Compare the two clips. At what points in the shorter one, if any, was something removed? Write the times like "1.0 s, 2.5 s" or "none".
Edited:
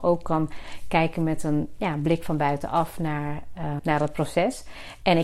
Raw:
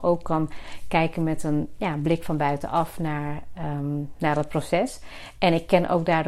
3.8 s